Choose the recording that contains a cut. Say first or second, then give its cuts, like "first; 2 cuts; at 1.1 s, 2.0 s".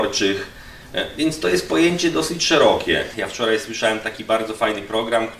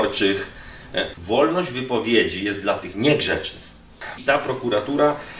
second; 2 cuts; at 1.1 s, 4.2 s